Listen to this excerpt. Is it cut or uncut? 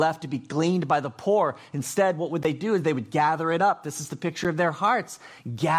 uncut